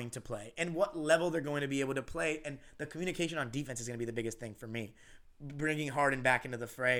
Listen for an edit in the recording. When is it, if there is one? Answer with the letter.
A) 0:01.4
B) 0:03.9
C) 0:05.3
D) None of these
D